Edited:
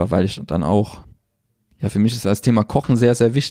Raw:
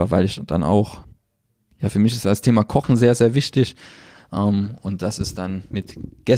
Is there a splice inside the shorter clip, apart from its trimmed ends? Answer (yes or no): no